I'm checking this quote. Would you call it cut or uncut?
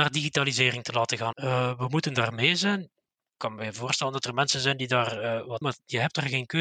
cut